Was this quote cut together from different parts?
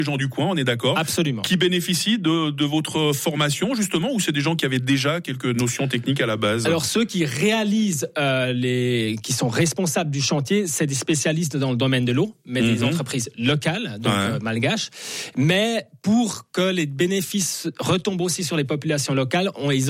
no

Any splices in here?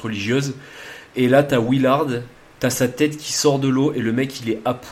no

